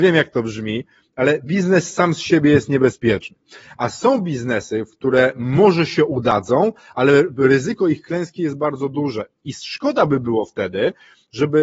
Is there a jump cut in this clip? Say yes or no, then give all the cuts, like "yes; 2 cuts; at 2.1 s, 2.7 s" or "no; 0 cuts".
no; 0 cuts